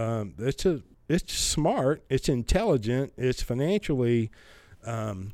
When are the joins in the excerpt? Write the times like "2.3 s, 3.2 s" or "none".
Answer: 0.9 s